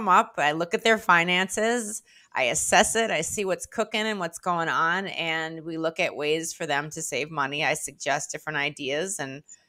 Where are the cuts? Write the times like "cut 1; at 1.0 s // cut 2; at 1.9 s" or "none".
none